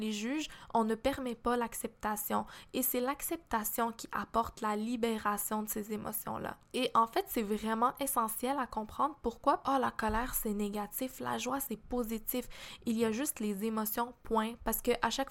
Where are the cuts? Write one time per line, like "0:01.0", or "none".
0:09.6
0:12.8